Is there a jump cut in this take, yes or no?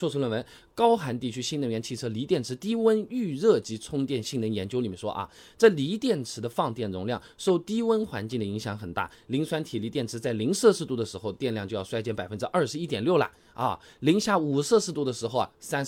no